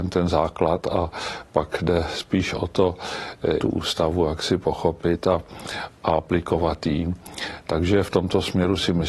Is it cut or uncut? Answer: cut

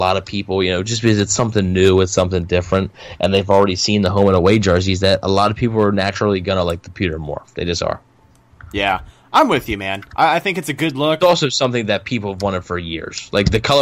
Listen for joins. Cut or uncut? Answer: cut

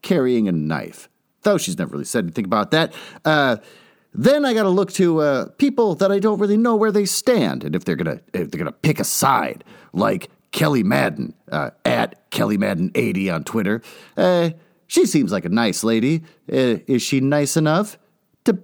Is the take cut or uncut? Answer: uncut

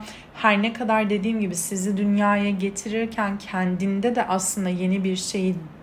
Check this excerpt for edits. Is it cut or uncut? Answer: uncut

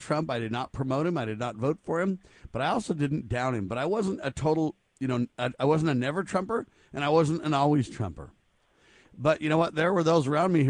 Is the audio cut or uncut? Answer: uncut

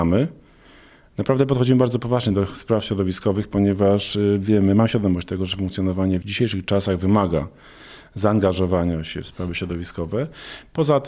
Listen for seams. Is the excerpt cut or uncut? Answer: uncut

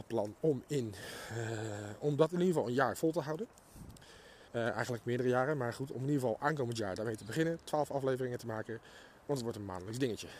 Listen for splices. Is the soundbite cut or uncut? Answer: cut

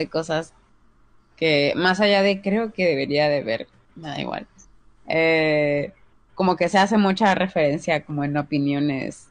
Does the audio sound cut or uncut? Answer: uncut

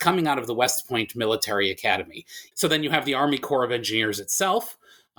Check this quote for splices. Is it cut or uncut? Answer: cut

